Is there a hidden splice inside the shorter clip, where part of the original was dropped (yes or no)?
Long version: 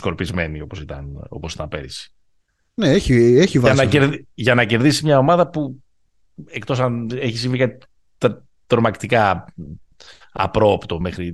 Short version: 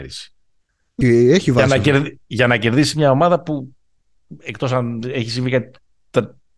yes